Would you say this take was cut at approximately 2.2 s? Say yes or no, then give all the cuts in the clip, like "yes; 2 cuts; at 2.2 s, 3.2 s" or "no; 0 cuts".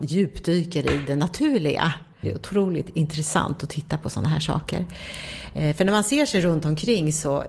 yes; 1 cut; at 2.2 s